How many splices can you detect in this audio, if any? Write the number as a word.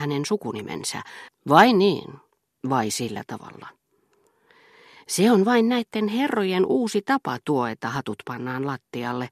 one